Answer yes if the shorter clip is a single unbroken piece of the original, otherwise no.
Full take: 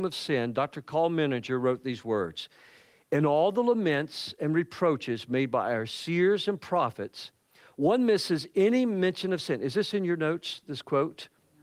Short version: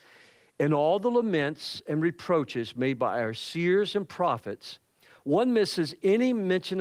yes